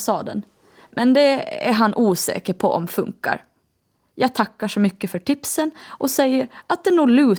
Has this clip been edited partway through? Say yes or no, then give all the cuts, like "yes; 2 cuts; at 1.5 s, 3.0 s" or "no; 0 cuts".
no; 0 cuts